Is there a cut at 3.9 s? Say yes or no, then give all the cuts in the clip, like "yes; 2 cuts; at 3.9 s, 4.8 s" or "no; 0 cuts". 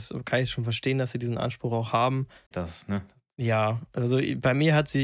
no; 1 cut; at 2.5 s